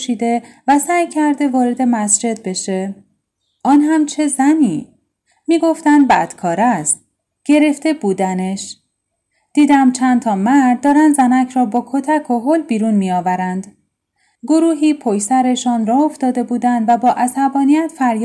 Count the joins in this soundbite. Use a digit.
0